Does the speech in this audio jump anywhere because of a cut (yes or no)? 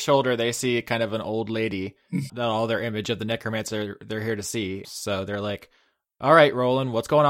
yes